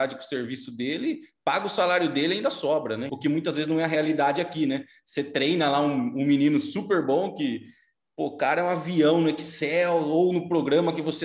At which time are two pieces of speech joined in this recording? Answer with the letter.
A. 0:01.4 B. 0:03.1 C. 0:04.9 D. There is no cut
B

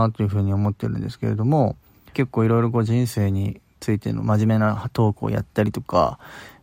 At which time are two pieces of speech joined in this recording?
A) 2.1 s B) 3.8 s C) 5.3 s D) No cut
A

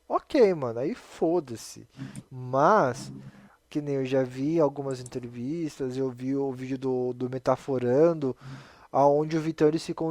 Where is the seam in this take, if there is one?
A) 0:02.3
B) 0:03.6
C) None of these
A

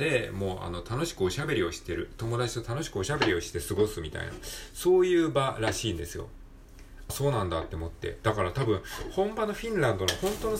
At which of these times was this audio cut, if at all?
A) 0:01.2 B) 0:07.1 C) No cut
B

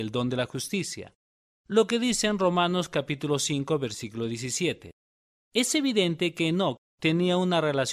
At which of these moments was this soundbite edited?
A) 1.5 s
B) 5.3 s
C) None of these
C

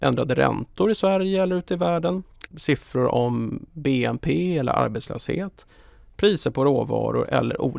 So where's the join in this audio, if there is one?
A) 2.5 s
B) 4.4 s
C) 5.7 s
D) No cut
A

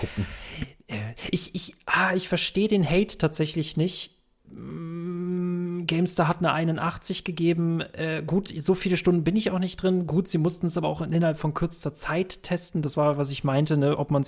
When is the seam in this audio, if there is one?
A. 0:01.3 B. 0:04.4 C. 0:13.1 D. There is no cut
B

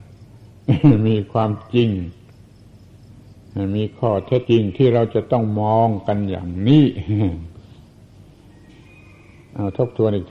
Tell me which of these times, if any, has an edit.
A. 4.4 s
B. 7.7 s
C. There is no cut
A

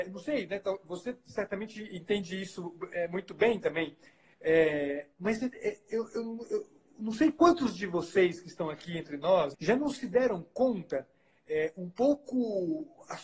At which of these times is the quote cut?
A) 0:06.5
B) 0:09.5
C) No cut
B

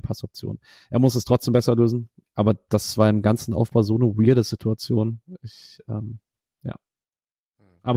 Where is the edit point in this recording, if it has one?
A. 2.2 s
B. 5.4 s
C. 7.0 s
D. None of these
A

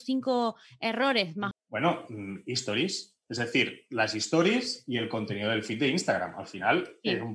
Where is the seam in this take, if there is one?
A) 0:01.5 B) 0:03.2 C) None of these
A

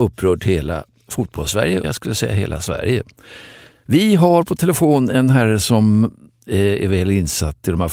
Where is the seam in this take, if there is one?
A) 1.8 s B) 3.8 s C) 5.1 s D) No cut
A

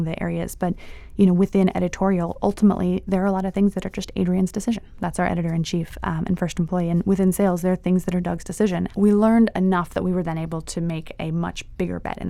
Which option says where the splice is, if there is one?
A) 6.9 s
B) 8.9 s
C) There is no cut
B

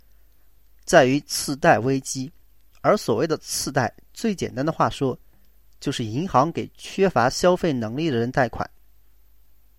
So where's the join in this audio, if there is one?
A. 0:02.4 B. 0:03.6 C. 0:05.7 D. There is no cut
D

